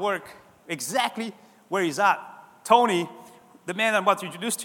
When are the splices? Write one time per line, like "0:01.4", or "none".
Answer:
none